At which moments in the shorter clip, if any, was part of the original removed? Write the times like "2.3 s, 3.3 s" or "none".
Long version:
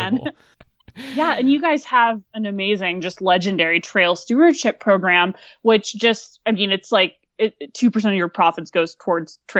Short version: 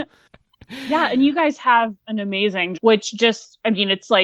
2.7 s